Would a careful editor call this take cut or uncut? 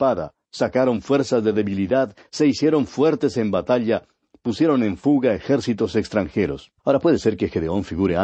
cut